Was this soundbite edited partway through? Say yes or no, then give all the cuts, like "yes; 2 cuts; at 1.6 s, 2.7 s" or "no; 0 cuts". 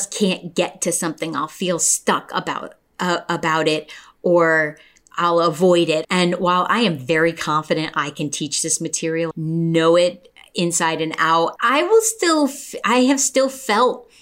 yes; 3 cuts; at 6.0 s, 9.3 s, 11.6 s